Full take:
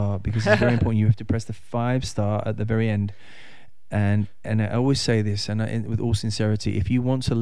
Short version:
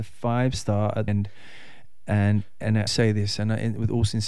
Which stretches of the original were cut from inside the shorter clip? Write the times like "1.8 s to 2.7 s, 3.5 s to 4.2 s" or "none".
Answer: 2.6 s to 2.9 s, 4.7 s to 5.0 s